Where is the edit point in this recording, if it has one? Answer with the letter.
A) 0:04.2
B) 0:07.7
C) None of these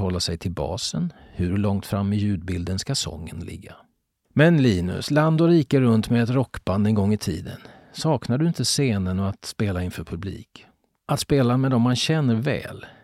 A